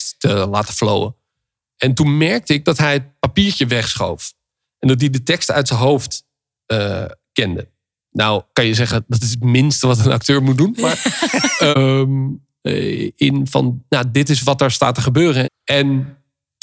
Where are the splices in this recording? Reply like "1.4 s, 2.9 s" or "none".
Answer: 11.7 s, 15.4 s